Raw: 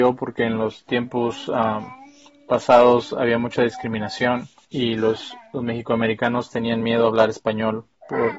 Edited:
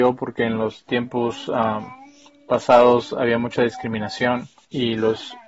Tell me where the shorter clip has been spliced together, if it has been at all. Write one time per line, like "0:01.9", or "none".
none